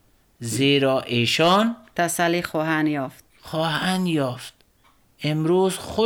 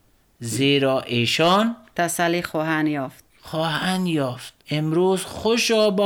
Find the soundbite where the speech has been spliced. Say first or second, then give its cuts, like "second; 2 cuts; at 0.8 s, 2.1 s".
second; 1 cut; at 4.6 s